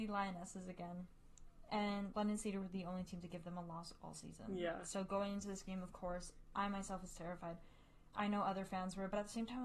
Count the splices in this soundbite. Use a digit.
0